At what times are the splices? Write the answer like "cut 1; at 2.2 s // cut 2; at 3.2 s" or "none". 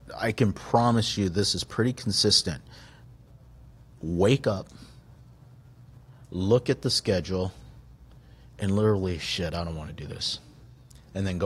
none